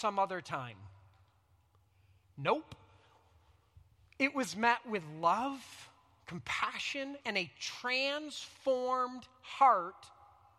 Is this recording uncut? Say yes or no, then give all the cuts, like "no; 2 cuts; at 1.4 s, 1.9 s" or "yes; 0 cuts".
no; 1 cut; at 7.2 s